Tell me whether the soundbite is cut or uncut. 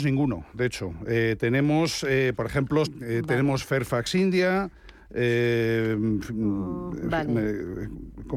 cut